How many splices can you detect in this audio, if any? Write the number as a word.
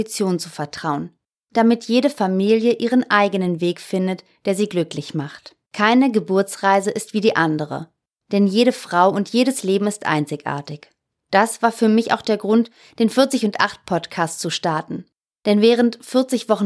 one